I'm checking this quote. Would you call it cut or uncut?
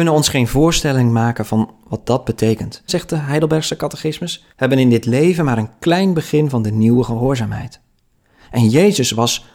cut